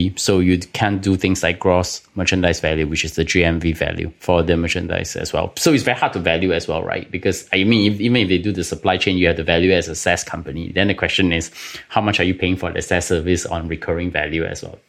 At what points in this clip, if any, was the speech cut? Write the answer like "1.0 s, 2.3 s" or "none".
none